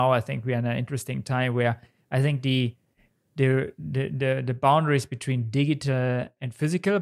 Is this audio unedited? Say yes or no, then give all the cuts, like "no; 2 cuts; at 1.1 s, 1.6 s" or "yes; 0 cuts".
yes; 0 cuts